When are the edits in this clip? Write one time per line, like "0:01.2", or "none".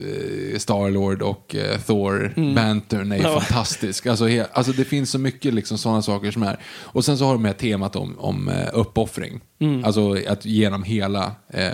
none